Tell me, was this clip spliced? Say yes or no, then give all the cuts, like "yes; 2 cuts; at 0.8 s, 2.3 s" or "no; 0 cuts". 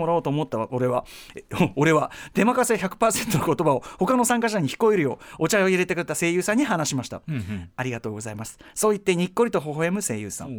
no; 0 cuts